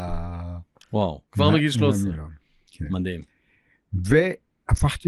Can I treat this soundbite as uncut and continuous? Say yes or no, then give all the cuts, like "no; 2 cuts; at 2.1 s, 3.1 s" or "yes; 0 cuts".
yes; 0 cuts